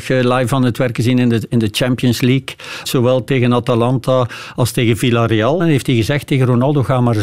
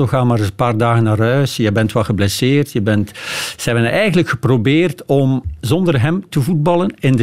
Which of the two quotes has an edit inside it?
first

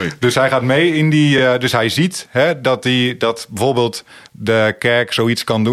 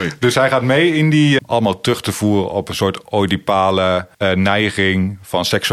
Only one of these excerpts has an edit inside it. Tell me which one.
second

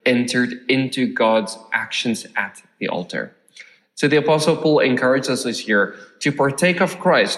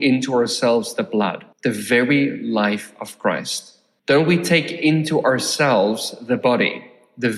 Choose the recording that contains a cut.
second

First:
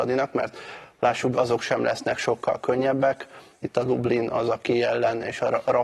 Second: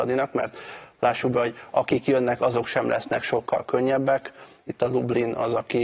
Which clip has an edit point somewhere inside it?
first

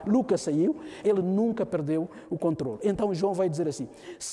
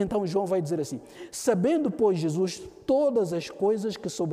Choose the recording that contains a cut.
first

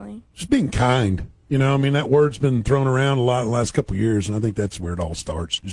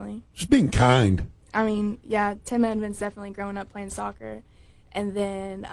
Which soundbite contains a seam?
second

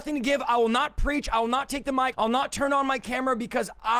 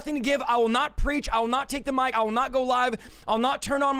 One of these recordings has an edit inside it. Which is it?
first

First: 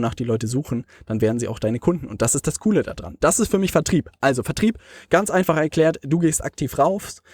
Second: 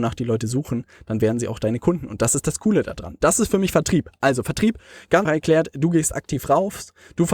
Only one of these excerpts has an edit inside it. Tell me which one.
second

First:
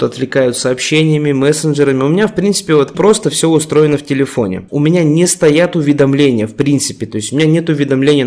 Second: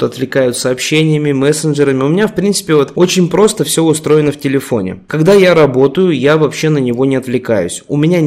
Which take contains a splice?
first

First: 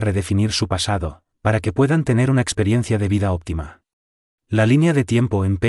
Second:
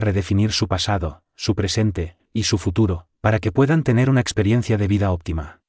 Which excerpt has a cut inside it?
first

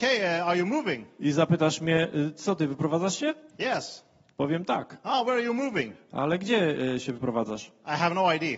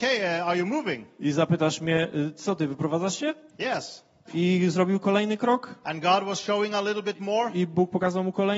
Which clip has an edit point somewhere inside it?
second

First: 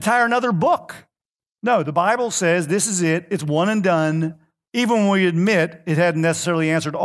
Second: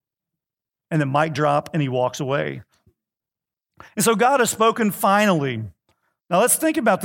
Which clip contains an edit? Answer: first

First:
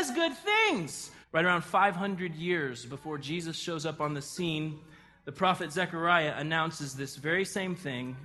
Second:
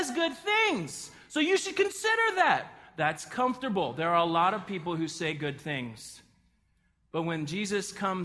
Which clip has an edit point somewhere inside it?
first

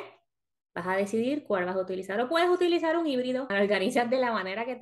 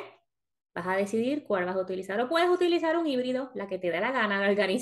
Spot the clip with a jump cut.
first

